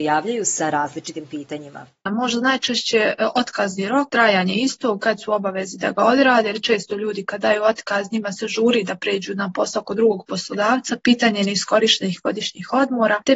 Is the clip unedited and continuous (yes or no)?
yes